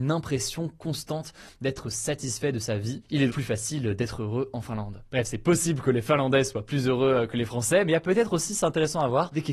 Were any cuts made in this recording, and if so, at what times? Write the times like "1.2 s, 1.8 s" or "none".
3.3 s